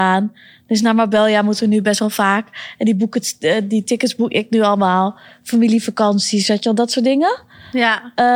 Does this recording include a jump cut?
no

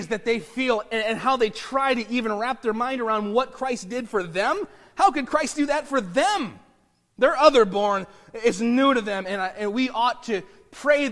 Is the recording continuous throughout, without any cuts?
yes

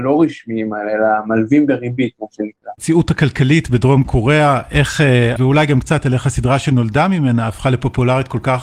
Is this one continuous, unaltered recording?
no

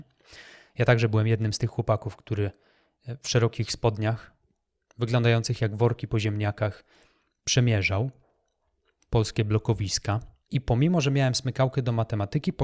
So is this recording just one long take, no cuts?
yes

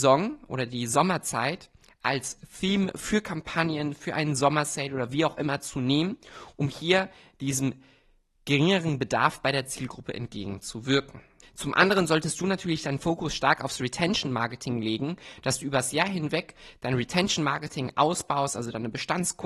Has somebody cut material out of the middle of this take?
yes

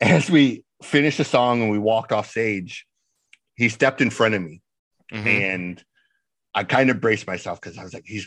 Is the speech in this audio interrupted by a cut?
no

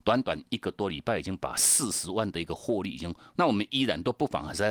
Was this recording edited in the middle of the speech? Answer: yes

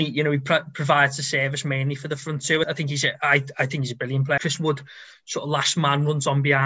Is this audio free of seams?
no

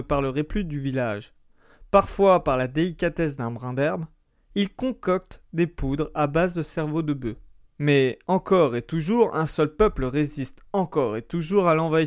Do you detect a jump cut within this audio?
yes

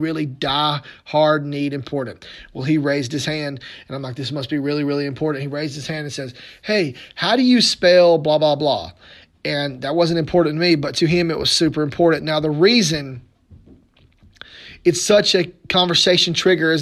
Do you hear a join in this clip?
no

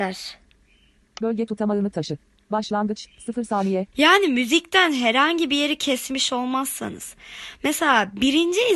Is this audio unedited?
no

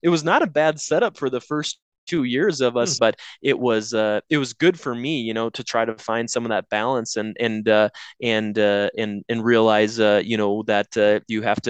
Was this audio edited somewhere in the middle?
yes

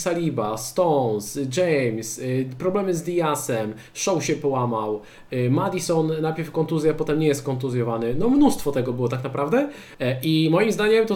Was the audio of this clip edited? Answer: yes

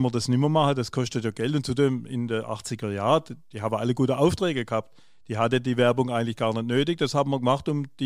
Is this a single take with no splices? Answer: yes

